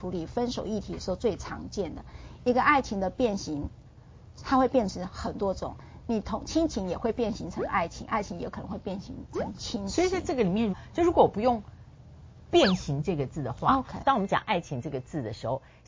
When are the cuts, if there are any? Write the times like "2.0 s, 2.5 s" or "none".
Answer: 2.4 s, 10.7 s, 14.0 s